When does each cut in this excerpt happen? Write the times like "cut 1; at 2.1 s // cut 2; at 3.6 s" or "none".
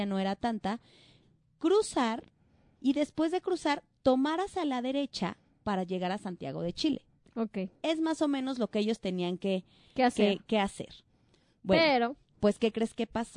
none

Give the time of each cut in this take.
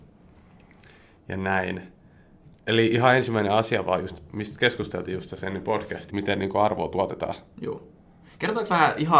cut 1; at 6.1 s

